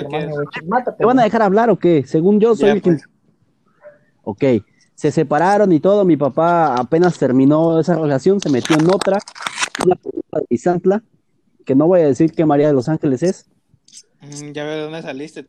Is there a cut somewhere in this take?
no; 0 cuts

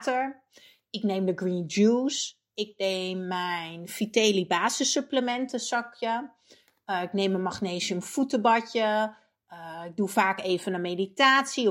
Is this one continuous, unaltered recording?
yes; 0 cuts

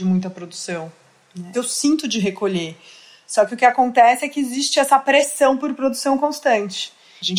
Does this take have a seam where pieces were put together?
yes; 1 cut; at 1.5 s

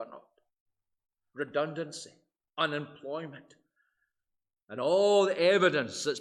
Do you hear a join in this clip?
no; 0 cuts

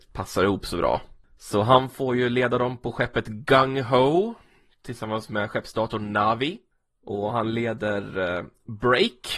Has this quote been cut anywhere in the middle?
no; 0 cuts

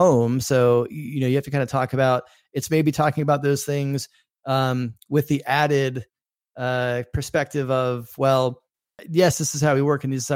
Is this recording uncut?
yes; 0 cuts

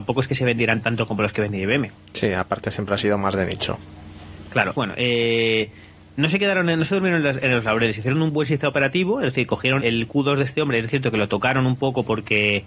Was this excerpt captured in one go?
no; 2 cuts; at 4.7 s, 9.8 s

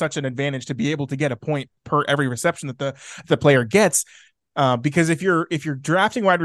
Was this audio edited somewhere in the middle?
yes; 1 cut; at 4.5 s

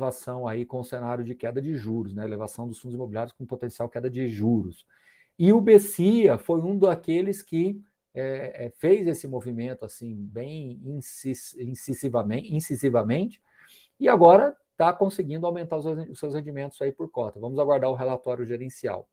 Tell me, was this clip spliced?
no; 0 cuts

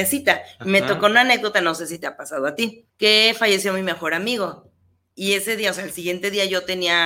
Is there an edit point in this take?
yes; 1 cut; at 2.9 s

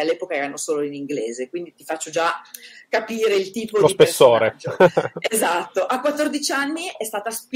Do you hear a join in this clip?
no; 0 cuts

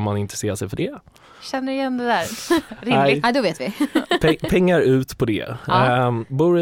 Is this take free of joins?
no; 1 cut; at 2.7 s

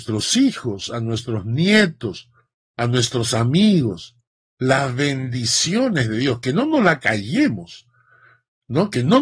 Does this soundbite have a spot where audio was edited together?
no; 0 cuts

